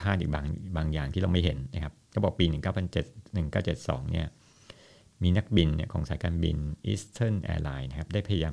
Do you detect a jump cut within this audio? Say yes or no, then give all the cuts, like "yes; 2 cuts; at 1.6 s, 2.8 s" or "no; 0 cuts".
no; 0 cuts